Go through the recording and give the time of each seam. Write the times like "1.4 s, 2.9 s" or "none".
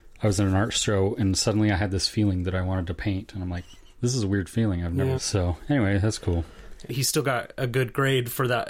5.2 s, 6.9 s